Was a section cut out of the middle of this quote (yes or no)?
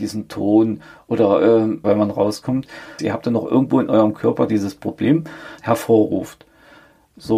yes